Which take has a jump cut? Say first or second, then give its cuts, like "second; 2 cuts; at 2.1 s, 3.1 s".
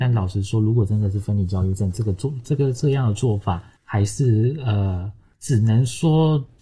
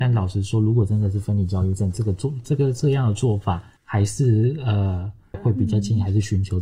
second; 1 cut; at 5.3 s